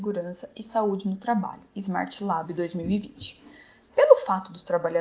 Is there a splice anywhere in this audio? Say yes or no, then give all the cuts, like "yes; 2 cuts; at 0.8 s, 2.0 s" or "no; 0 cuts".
no; 0 cuts